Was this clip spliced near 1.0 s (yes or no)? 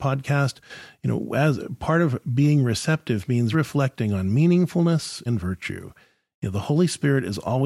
no